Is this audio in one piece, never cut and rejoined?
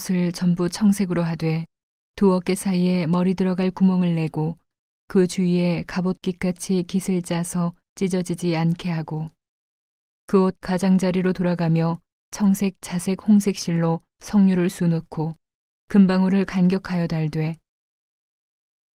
yes; 0 cuts

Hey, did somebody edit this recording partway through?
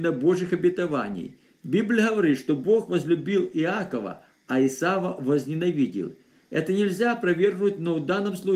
no; 0 cuts

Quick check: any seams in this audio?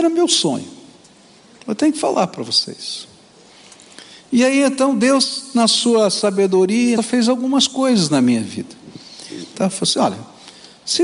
yes; 2 cuts; at 7.0 s, 9.5 s

